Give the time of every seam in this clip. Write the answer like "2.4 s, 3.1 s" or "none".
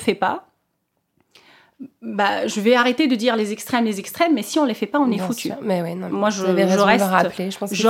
6.1 s